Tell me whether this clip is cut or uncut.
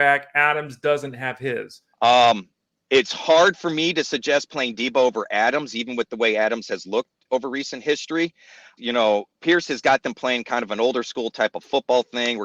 cut